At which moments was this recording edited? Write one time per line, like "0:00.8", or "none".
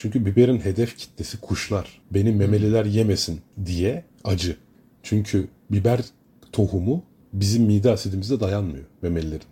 0:02.0